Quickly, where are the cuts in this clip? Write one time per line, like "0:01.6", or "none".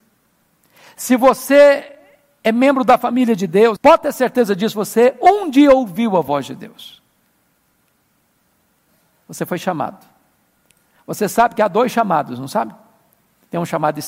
0:03.8